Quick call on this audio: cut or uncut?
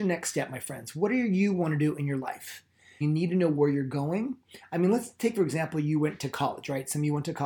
cut